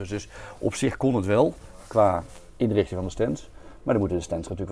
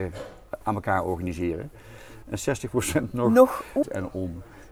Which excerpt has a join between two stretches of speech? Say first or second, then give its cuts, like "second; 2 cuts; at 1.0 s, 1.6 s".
second; 2 cuts; at 2.2 s, 3.8 s